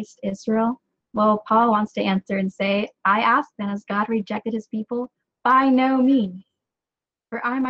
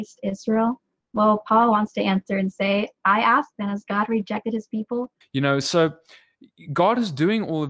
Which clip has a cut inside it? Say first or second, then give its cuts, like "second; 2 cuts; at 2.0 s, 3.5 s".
second; 1 cut; at 5.2 s